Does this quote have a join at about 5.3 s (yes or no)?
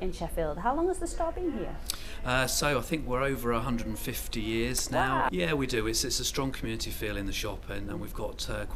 yes